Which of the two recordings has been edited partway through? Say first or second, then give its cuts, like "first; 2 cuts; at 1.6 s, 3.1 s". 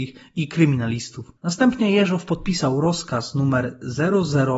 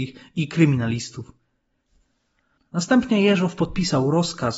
first; 1 cut; at 1.4 s